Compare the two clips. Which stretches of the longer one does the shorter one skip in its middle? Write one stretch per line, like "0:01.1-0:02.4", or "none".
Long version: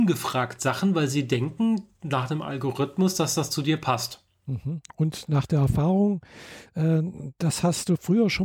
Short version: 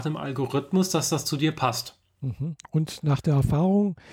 none